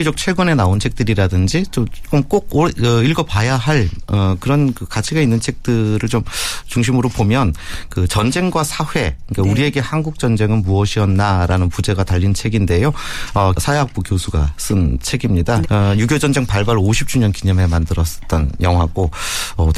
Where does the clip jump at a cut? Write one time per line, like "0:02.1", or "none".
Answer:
0:13.6
0:15.6